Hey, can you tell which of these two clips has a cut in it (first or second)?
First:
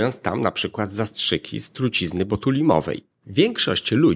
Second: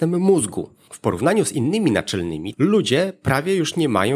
second